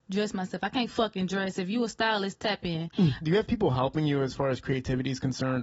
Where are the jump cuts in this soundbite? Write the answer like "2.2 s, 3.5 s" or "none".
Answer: 3.2 s